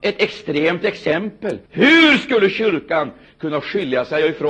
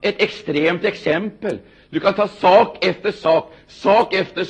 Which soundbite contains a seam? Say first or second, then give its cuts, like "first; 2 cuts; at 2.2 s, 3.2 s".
first; 1 cut; at 1.7 s